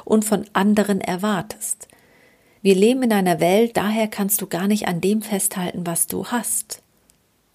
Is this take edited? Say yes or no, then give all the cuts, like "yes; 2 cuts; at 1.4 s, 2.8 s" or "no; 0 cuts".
yes; 1 cut; at 3.7 s